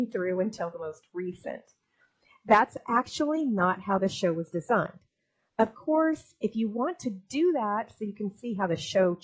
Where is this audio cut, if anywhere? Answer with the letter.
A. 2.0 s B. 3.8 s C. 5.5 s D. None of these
D